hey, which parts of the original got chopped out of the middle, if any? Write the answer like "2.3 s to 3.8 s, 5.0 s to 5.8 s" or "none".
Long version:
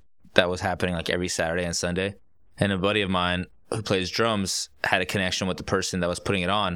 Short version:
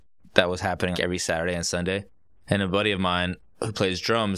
0.9 s to 1.0 s